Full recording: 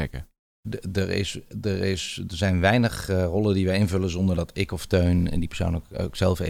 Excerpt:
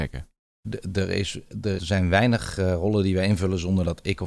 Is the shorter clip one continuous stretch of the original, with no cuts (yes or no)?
no